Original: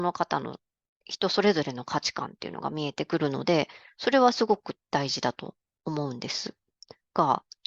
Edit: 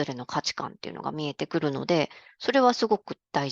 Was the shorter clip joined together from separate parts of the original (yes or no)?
no